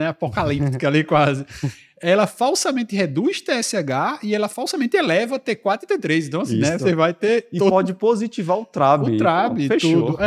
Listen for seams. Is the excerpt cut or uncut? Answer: uncut